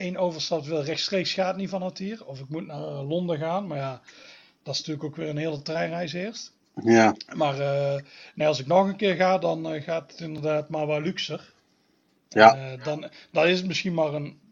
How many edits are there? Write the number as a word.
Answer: zero